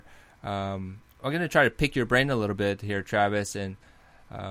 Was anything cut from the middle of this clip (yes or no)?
no